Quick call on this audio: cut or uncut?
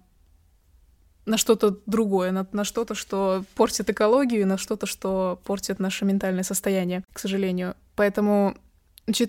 uncut